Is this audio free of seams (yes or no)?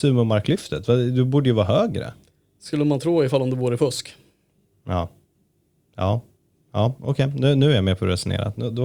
yes